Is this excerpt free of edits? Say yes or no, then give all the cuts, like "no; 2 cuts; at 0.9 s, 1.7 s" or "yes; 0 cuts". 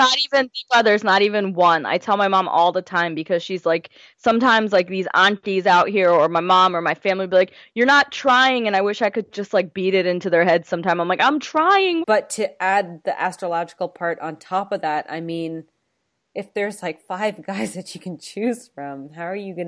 no; 1 cut; at 12.0 s